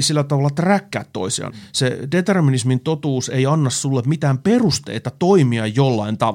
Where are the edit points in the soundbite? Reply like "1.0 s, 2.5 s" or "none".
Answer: 1.5 s